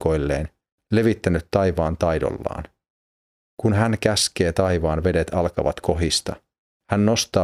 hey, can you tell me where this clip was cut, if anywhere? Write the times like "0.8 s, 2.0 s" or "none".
none